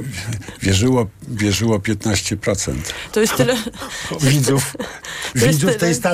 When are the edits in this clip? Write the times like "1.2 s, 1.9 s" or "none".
3.1 s